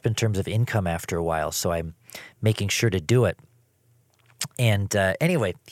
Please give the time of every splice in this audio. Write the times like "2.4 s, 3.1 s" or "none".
none